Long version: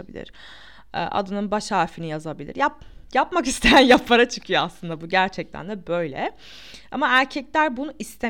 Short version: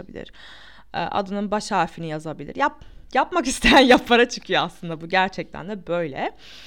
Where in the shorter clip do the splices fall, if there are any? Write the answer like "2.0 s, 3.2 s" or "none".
none